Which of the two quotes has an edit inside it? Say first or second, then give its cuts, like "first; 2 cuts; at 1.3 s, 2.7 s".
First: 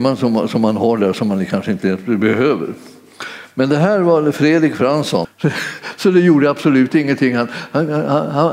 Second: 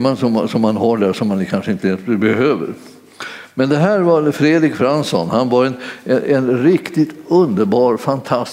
first; 1 cut; at 5.2 s